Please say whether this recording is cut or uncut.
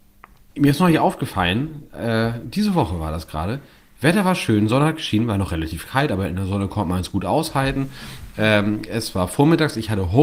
uncut